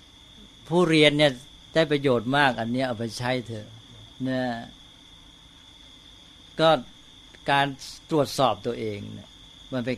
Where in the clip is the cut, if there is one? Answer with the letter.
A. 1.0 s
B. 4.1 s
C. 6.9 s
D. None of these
B